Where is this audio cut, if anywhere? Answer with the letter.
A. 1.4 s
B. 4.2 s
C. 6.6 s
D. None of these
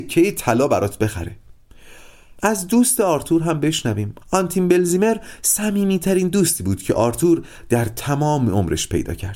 B